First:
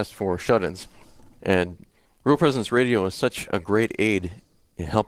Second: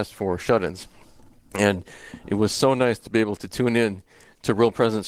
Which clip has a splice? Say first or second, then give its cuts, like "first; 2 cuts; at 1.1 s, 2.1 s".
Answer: first; 1 cut; at 1.4 s